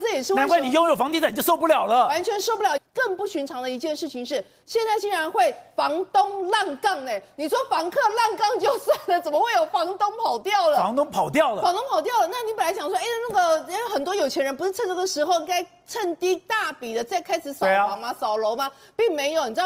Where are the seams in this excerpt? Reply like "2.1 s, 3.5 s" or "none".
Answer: none